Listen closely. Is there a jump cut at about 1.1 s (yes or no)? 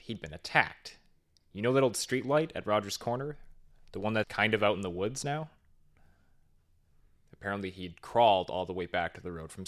no